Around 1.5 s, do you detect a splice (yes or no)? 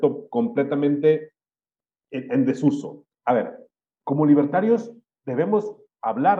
no